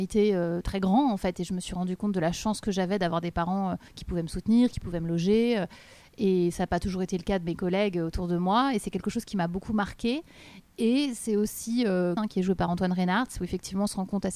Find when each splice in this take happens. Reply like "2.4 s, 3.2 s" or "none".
3.9 s, 12.2 s